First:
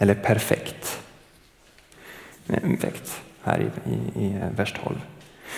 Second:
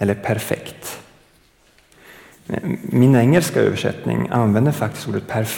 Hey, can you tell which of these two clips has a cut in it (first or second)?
first